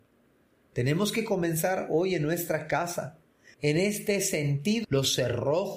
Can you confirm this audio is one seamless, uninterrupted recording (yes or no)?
no